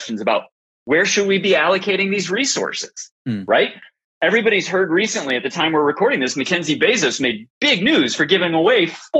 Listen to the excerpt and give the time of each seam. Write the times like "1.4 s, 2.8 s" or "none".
none